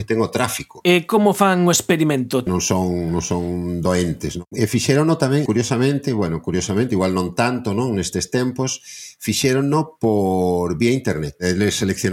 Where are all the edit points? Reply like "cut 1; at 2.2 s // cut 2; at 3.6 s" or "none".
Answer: cut 1; at 2.5 s // cut 2; at 5.5 s